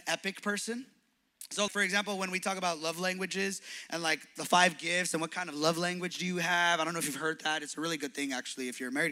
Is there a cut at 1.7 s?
yes; 1 cut; at 1.7 s

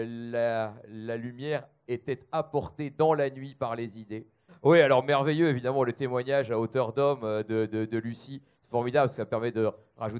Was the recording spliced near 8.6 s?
no; 1 cut; at 4.5 s

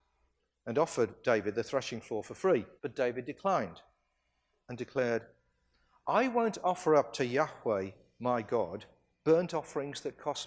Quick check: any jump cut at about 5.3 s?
no; 1 cut; at 2.8 s

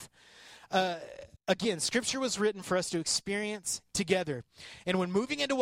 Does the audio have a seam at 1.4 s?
yes; 1 cut; at 1.4 s

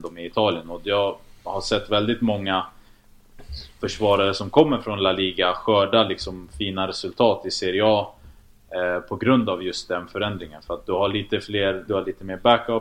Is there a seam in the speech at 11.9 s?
yes; 1 cut; at 11.9 s

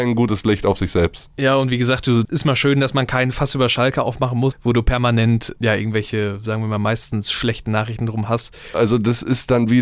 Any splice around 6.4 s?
no; 3 cuts; at 2.3 s, 4.5 s, 8.7 s

